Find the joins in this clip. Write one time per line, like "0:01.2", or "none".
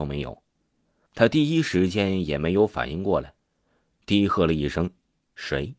0:01.1